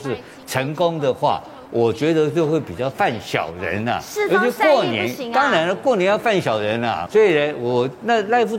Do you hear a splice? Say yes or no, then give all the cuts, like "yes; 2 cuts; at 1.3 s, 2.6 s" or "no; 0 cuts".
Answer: yes; 1 cut; at 7.1 s